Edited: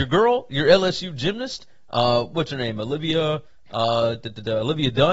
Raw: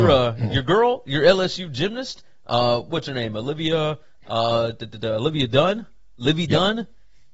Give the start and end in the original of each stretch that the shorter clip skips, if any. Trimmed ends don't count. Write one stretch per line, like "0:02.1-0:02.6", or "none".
none